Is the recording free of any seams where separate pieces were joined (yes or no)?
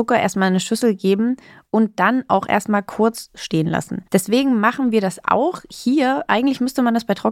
no